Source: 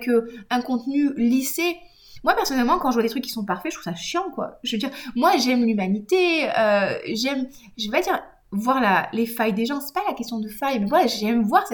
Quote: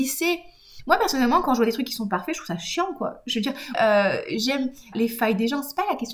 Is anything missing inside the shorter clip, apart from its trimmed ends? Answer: yes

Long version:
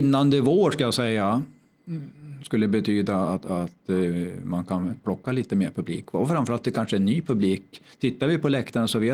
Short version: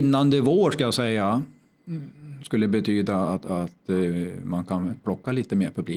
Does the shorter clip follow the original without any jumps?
yes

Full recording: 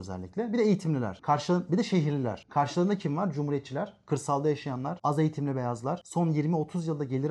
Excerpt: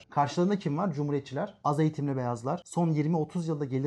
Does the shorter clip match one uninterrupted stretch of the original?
no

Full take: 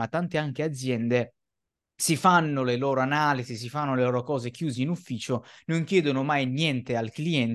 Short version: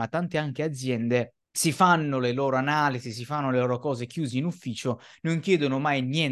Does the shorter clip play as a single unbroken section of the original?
no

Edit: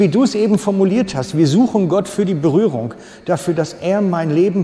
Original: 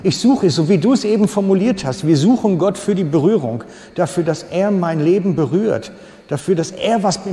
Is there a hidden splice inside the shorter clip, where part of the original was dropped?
no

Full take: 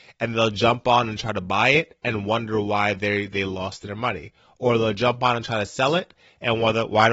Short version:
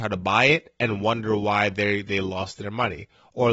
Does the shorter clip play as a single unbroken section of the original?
yes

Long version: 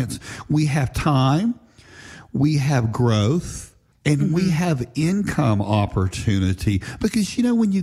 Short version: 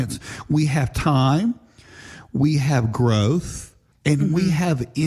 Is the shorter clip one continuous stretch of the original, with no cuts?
yes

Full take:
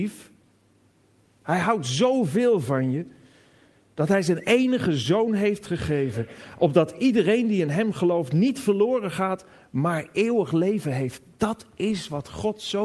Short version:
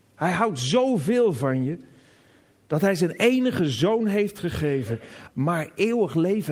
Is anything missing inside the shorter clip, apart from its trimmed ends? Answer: yes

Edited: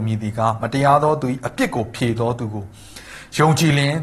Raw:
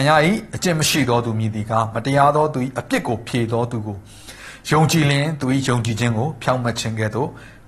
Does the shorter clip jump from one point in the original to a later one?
no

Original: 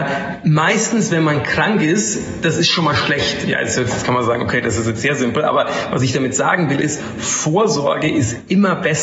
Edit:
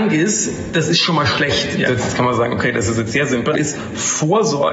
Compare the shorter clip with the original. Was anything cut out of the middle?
yes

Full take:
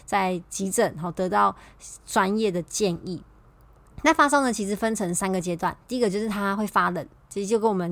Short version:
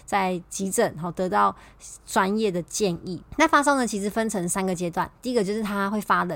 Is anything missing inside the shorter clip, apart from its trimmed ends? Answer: yes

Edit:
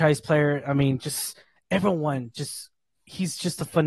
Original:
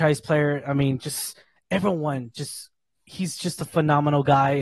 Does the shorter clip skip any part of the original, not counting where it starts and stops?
no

